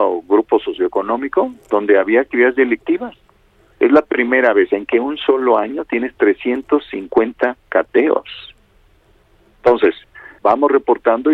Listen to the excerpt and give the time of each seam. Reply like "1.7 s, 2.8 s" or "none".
10.4 s